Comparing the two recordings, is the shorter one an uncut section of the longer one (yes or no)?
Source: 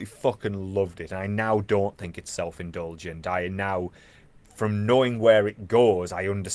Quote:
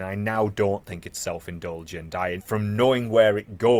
no